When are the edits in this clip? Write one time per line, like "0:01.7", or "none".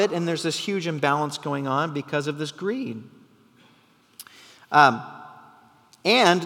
none

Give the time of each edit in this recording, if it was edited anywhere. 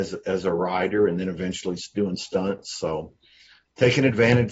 none

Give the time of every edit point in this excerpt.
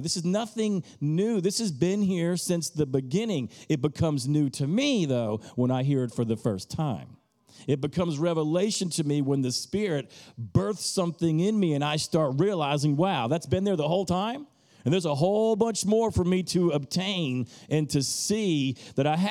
none

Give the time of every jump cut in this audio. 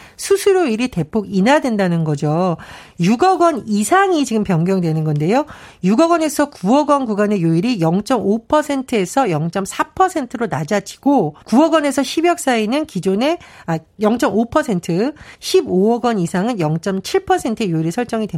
0:11.4
0:15.3

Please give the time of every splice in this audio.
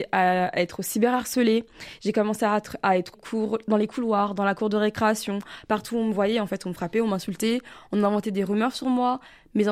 0:03.1

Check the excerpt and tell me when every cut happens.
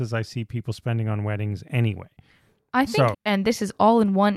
0:03.1

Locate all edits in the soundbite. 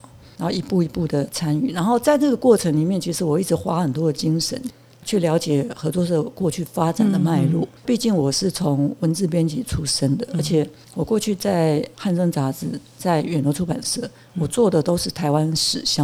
0:07.8

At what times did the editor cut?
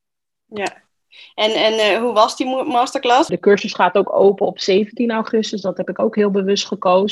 0:03.3

